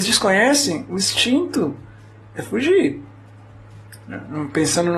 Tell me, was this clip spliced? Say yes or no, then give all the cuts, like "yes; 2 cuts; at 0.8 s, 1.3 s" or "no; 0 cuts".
no; 0 cuts